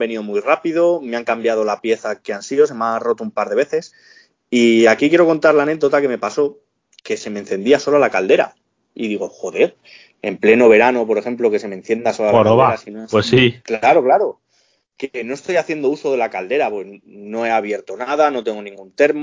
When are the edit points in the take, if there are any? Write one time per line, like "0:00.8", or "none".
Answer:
0:02.2